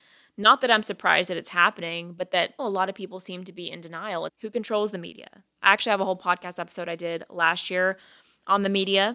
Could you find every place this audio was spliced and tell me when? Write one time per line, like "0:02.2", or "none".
0:02.6
0:04.3
0:05.6